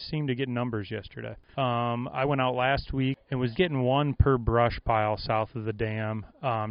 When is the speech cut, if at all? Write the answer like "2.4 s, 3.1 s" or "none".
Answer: 1.5 s, 3.5 s